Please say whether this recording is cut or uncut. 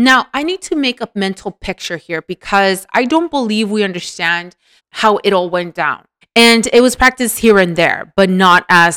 cut